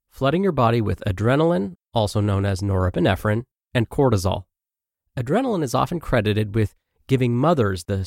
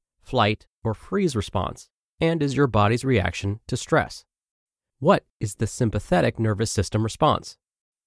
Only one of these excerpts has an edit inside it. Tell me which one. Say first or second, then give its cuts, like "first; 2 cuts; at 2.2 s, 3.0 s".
second; 1 cut; at 4.9 s